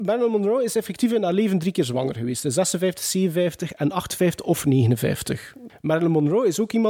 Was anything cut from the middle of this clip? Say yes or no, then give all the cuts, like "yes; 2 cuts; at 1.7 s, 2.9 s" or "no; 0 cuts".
yes; 1 cut; at 5.7 s